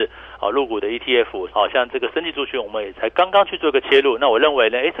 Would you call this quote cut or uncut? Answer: cut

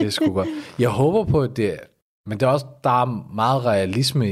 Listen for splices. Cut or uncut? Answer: uncut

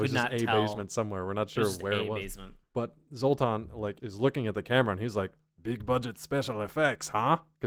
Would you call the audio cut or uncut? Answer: cut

